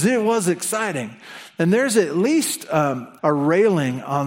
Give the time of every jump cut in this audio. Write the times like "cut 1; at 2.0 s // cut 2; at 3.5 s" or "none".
cut 1; at 3.2 s